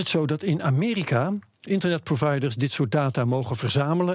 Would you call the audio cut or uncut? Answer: cut